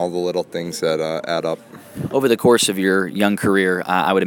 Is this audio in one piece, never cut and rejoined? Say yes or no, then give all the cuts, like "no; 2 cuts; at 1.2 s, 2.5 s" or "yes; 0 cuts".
yes; 0 cuts